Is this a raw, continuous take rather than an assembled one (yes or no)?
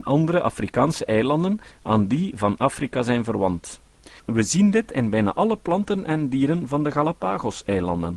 no